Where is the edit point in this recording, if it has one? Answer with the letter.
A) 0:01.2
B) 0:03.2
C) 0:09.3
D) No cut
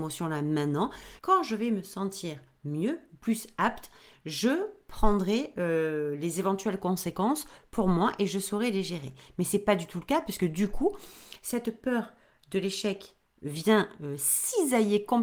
A